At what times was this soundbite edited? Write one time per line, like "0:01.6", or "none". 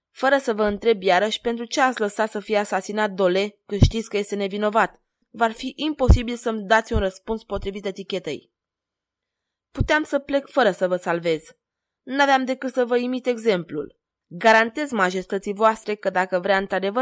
0:05.2
0:14.1